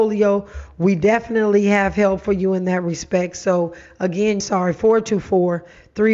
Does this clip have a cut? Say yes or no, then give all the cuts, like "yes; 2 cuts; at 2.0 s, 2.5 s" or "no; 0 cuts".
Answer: yes; 1 cut; at 4.4 s